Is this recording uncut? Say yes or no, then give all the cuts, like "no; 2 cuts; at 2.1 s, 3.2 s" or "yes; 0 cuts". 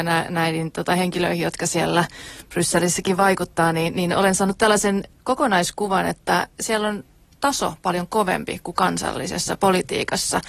yes; 0 cuts